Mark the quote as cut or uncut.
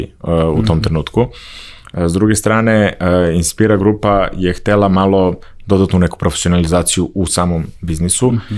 uncut